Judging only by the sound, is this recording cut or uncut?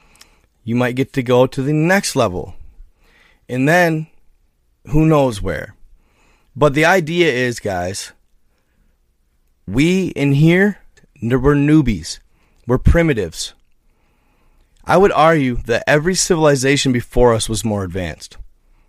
uncut